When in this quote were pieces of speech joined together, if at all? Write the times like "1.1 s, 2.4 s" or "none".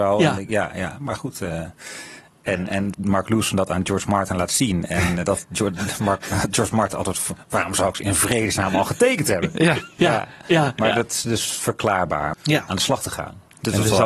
2.9 s, 10.0 s, 12.3 s